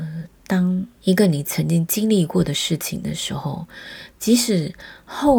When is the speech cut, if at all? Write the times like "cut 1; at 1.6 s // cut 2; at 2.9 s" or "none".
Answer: cut 1; at 1.0 s